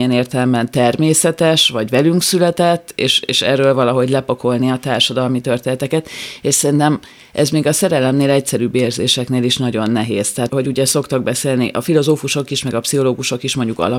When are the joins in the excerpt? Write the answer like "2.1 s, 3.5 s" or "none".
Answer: 10.5 s